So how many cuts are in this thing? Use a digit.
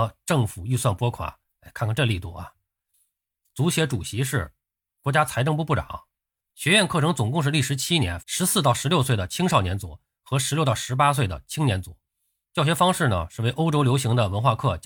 2